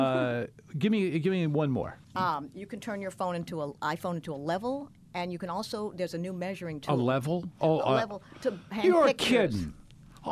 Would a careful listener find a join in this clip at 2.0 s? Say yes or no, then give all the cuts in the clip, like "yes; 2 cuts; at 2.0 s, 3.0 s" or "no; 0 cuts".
yes; 1 cut; at 2.0 s